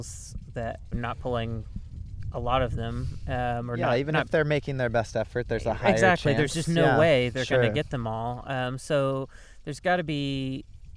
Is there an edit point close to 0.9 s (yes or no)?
yes